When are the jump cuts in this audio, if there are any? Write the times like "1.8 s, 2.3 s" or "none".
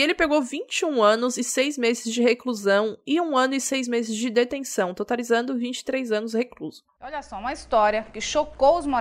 7.0 s